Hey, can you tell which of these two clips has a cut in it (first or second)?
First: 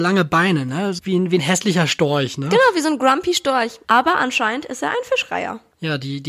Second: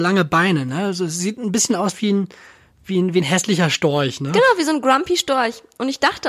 first